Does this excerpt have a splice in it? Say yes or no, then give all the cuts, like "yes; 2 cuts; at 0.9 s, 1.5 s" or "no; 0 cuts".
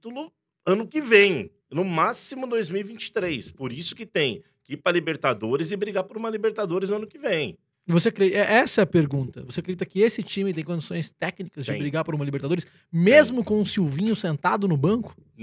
yes; 1 cut; at 1.6 s